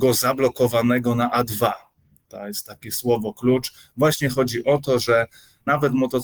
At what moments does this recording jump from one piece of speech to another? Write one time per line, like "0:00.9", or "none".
none